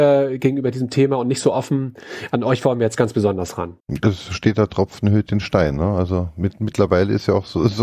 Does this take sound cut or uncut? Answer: cut